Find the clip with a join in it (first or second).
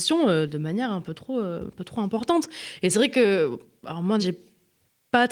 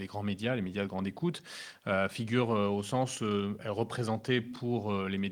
first